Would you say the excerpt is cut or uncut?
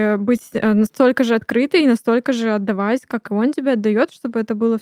uncut